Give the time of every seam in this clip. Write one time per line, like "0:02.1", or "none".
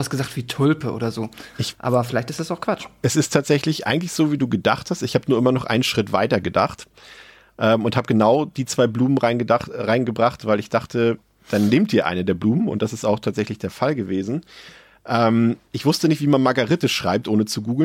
0:01.5
0:15.6